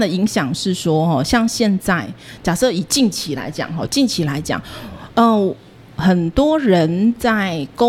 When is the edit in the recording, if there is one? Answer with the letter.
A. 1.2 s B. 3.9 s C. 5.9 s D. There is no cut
B